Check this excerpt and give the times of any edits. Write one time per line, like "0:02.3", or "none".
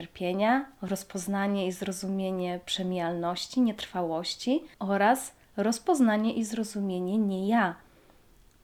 0:04.7